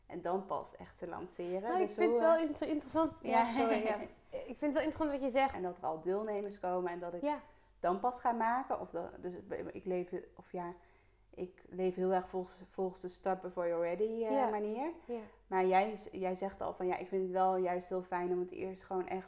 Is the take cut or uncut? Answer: cut